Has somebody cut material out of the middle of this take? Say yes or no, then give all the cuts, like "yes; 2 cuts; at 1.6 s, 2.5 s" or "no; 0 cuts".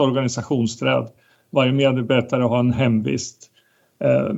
no; 0 cuts